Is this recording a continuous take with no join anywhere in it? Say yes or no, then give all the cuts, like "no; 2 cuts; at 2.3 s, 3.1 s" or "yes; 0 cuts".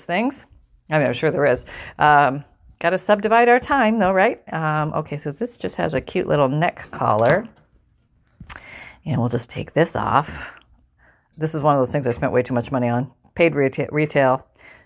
no; 1 cut; at 11.3 s